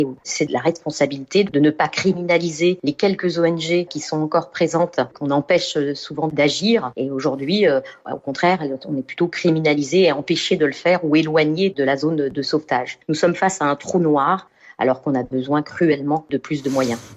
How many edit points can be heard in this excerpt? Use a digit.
0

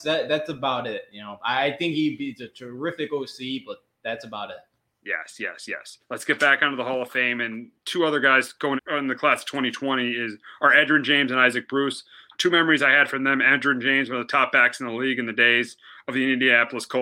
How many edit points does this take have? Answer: 1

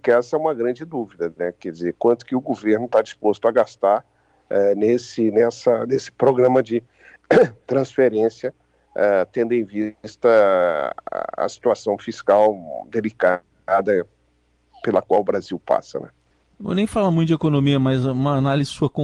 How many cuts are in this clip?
0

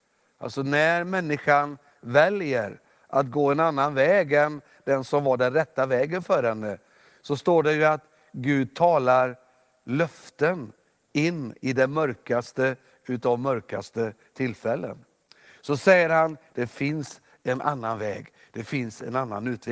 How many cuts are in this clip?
1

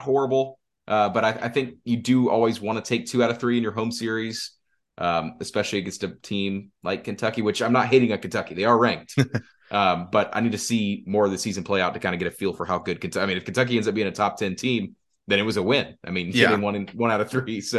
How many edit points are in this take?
0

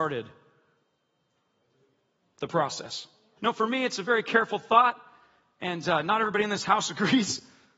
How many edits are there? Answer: 1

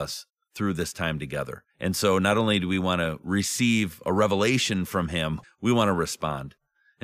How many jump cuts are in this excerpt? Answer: 2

